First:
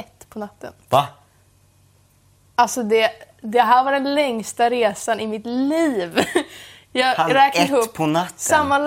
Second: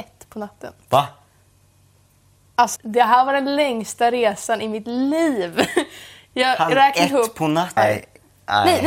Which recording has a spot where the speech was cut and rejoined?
second; 2 cuts; at 2.8 s, 7.8 s

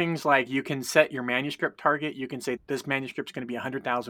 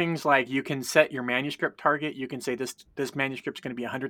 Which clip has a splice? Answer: first; 1 cut; at 2.6 s

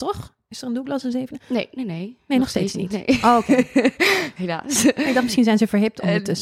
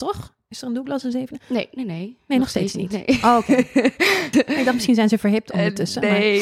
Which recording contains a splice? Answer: second; 1 cut; at 4.3 s

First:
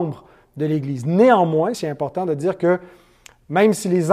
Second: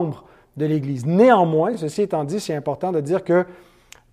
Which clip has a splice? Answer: first; 1 cut; at 1.7 s

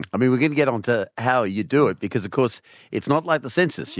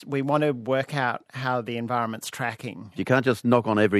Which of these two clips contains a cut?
second; 1 cut; at 3.0 s

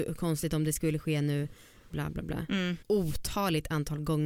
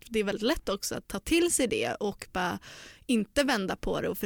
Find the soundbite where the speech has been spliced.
first; 1 cut; at 2.8 s

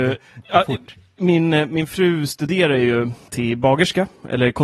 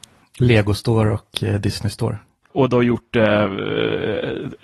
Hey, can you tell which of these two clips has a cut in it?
second; 1 cut; at 2.5 s

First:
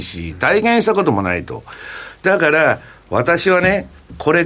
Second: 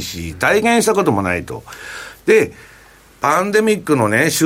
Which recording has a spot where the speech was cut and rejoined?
second; 1 cut; at 2.2 s

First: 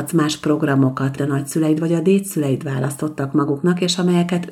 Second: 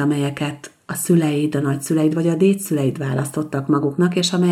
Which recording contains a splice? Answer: first; 1 cut; at 1.2 s

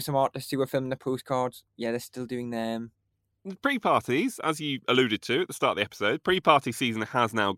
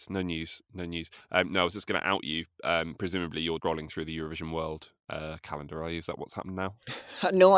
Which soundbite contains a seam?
second; 1 cut; at 3.6 s

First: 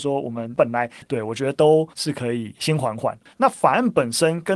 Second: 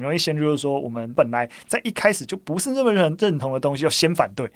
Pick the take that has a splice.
first; 2 cuts; at 1.0 s, 3.3 s

